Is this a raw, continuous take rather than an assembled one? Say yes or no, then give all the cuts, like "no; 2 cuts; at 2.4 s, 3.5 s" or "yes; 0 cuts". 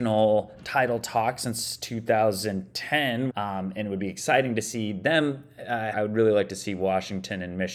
no; 2 cuts; at 3.3 s, 5.9 s